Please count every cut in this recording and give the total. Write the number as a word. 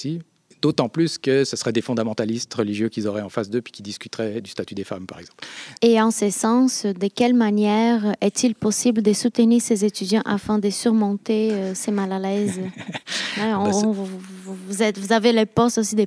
one